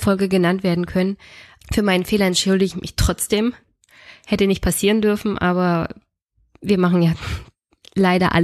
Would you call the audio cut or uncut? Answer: cut